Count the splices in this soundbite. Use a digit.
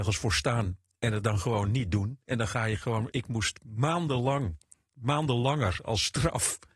0